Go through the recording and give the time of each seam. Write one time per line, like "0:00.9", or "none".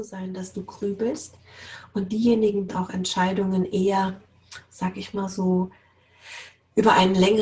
0:02.7